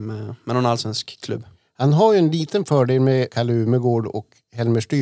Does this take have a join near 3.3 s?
yes; 1 cut; at 3.3 s

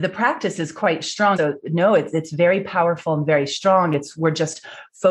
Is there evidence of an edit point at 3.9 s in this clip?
no; 1 cut; at 1.4 s

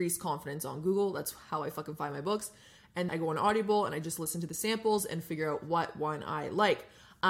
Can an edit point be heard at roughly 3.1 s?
yes; 1 cut; at 3.1 s

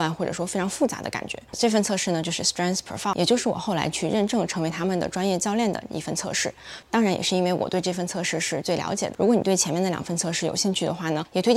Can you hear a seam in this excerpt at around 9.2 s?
no; 1 cut; at 6.8 s

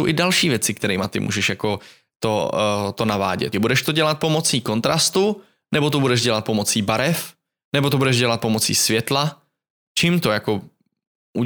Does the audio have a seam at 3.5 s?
yes; 1 cut; at 3.5 s

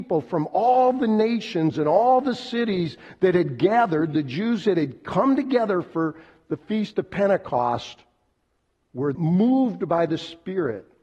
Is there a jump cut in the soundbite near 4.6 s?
no; 1 cut; at 9.1 s

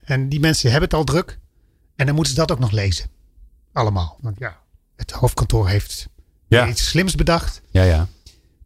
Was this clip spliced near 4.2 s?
yes; 1 cut; at 4.2 s

